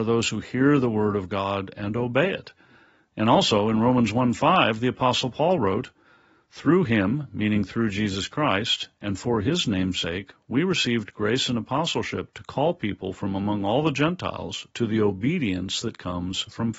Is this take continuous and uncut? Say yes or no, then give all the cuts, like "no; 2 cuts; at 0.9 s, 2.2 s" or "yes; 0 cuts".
yes; 0 cuts